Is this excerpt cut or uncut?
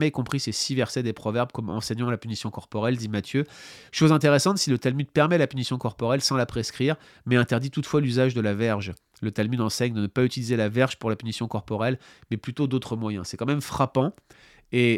uncut